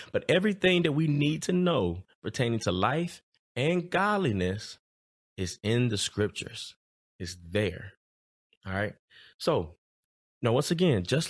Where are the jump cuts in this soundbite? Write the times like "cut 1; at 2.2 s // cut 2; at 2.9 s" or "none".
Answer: none